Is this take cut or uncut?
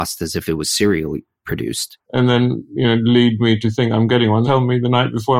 cut